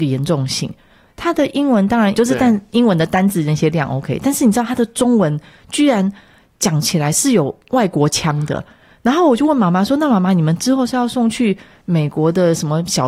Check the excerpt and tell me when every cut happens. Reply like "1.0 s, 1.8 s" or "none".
1.1 s, 2.1 s